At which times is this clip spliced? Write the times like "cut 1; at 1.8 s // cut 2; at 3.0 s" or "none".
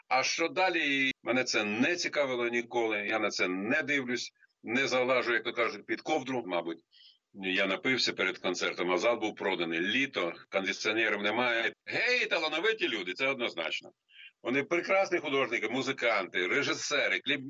cut 1; at 1.1 s // cut 2; at 6.4 s // cut 3; at 11.7 s

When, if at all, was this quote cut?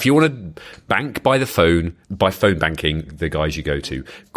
cut 1; at 2.0 s // cut 2; at 3.1 s

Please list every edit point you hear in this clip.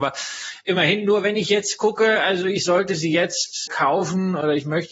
cut 1; at 3.7 s

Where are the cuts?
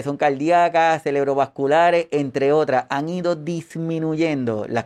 none

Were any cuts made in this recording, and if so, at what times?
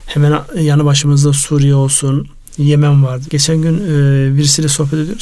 cut 1; at 3.3 s

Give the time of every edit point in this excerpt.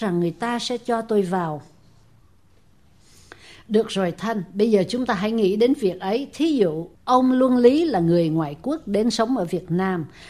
cut 1; at 6.9 s

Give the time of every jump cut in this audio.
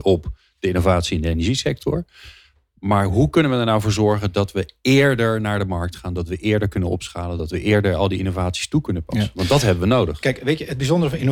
none

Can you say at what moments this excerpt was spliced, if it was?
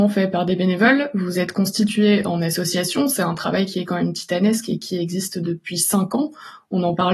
none

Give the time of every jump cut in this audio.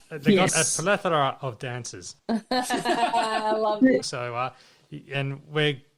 cut 1; at 2.2 s // cut 2; at 4.0 s

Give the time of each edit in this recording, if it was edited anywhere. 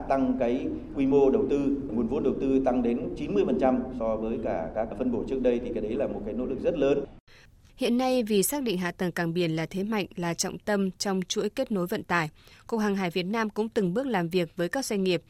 none

